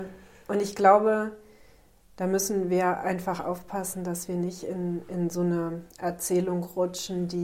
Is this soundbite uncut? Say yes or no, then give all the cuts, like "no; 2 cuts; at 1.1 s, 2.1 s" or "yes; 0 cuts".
yes; 0 cuts